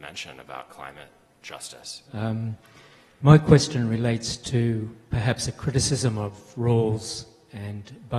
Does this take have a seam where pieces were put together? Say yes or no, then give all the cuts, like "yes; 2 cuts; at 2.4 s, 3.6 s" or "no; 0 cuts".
yes; 1 cut; at 2.1 s